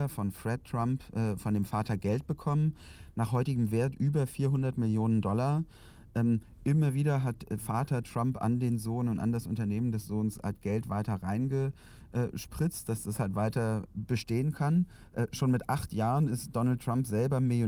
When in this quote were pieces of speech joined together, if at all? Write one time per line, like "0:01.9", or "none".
none